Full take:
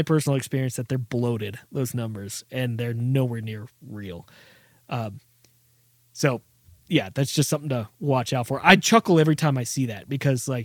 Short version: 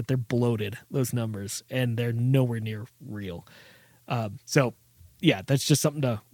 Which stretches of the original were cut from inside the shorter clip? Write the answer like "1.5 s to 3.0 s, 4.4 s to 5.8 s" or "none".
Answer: 5.2 s to 6.1 s